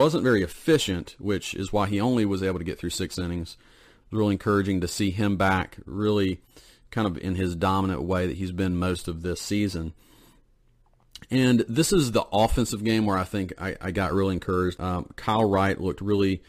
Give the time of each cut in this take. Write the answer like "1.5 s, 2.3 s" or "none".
4.0 s, 14.8 s